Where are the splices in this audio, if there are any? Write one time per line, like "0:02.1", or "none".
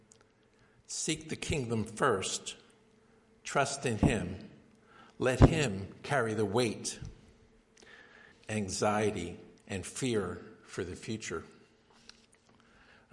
0:08.3
0:09.6